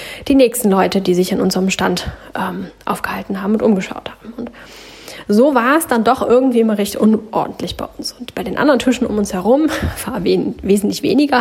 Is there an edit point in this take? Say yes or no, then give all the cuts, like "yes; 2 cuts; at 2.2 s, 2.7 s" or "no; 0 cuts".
no; 0 cuts